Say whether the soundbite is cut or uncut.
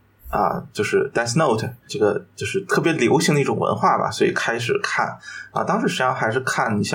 cut